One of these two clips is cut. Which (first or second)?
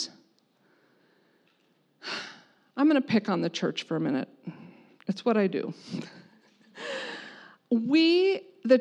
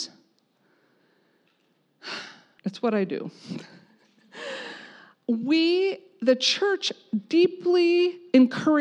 second